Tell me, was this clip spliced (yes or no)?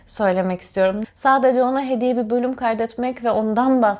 yes